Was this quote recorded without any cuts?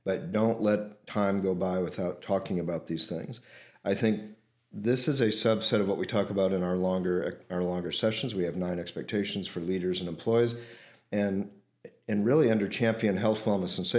no; 1 cut; at 2.2 s

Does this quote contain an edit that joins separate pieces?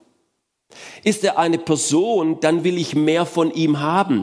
no; 0 cuts

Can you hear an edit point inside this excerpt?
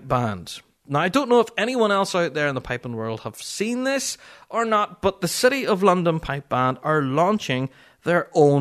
no; 0 cuts

